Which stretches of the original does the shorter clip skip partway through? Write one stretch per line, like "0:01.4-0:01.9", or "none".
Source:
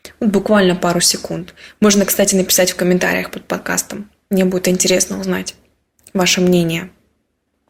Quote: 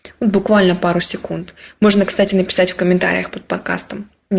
none